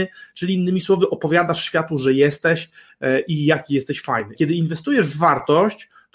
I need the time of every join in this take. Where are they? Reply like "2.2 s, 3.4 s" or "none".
4.3 s